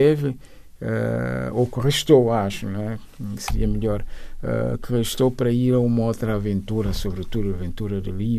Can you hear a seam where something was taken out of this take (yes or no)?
no